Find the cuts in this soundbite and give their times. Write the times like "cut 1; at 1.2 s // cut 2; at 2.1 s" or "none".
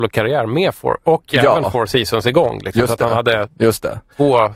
cut 1; at 1.0 s